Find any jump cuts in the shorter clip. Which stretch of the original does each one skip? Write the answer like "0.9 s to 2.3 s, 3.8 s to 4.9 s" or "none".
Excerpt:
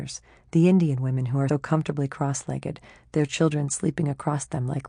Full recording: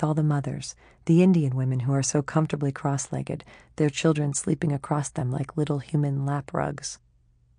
2.0 s to 2.1 s